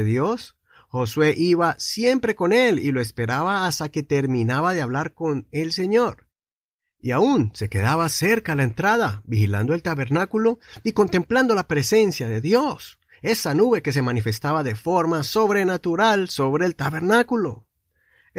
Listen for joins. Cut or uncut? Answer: uncut